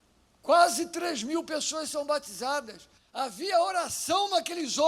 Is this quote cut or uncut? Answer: cut